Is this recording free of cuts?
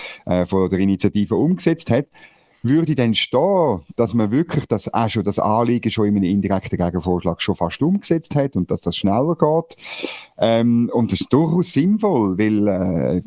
yes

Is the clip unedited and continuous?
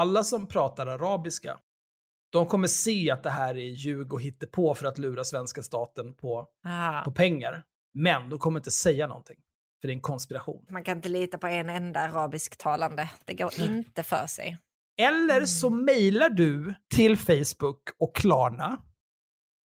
no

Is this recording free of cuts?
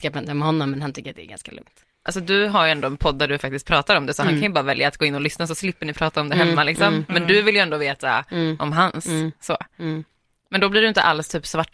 yes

